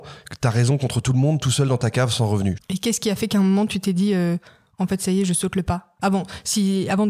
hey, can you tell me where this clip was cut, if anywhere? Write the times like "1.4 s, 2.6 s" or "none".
2.6 s